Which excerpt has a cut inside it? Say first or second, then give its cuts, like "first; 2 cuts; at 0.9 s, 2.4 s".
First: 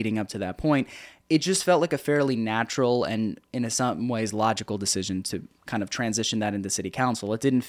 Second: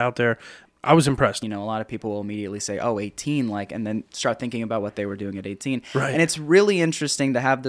second; 1 cut; at 1.4 s